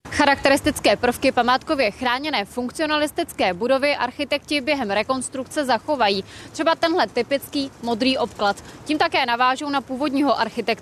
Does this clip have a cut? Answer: no; 0 cuts

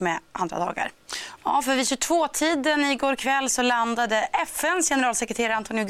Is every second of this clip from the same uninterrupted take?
no; 1 cut; at 1.4 s

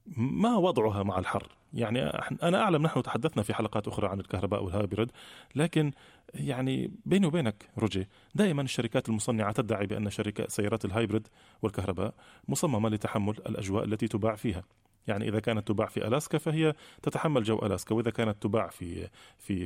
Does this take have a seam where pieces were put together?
no; 0 cuts

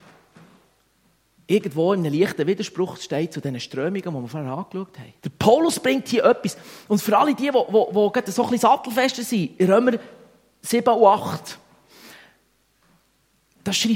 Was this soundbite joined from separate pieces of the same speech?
yes; 1 cut; at 5.2 s

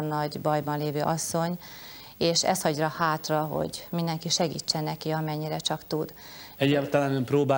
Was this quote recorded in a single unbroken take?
no; 1 cut; at 6.6 s

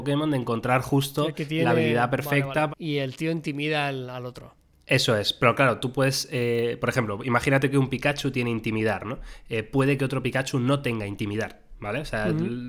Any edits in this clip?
yes; 1 cut; at 2.7 s

